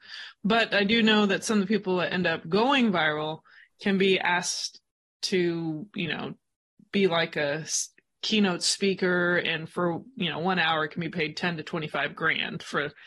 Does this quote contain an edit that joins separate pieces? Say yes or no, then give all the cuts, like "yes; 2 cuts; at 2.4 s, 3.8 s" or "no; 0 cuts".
no; 0 cuts